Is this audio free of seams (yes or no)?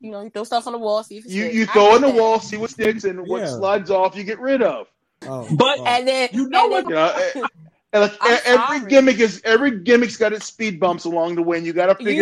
no